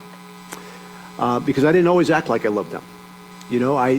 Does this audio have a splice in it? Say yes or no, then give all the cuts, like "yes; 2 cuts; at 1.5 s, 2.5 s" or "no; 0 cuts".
no; 0 cuts